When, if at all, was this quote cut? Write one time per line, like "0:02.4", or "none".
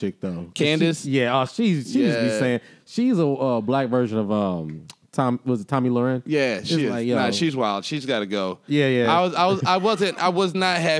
none